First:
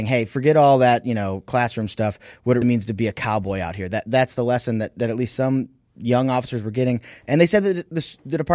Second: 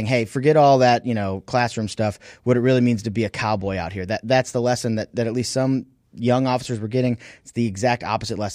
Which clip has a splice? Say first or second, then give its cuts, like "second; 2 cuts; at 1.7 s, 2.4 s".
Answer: first; 2 cuts; at 2.6 s, 7.2 s